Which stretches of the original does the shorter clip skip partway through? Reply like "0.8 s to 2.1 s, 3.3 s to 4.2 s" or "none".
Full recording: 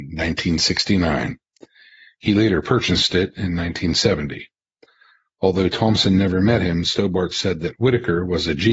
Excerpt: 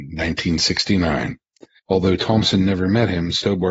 1.8 s to 5.3 s